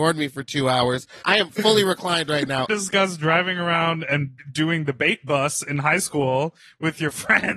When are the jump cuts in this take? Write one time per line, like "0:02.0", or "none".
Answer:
0:01.2
0:02.7